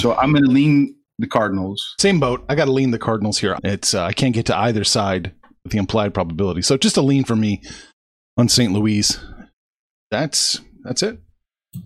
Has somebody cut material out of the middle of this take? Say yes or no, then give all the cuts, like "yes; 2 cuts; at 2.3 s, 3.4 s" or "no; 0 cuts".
yes; 1 cut; at 3.5 s